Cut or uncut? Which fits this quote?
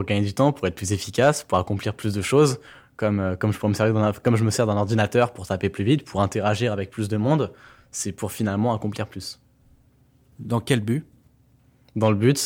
uncut